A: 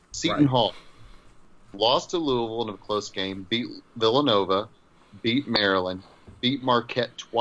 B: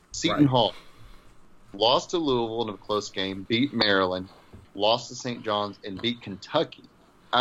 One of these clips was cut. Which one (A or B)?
B